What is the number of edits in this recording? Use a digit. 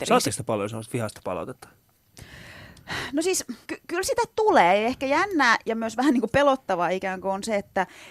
1